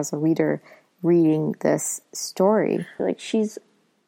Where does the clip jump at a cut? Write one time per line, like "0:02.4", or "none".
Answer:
0:03.0